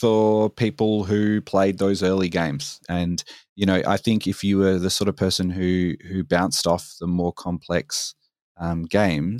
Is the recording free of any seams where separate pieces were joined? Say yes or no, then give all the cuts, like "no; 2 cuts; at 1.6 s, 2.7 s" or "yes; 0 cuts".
no; 1 cut; at 2.8 s